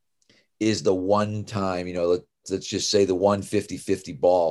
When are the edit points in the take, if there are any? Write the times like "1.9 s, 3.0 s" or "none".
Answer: none